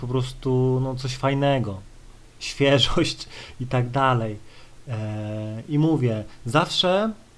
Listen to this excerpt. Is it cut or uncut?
uncut